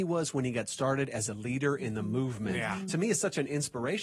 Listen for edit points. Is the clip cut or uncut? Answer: uncut